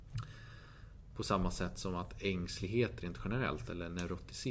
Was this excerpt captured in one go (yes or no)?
no